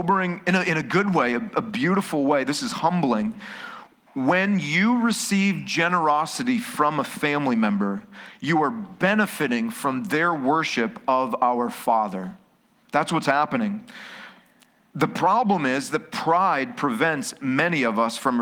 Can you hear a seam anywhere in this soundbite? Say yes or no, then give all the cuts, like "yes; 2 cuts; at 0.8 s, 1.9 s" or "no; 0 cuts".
no; 0 cuts